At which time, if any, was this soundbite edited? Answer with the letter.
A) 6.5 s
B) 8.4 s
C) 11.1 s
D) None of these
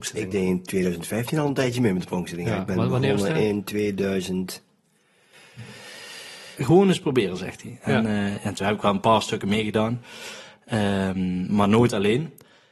A